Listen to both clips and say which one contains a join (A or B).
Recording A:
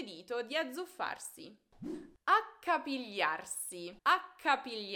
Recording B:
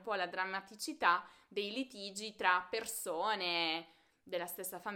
A